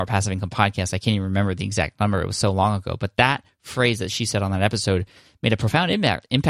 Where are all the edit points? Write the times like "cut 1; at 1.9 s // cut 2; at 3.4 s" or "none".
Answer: none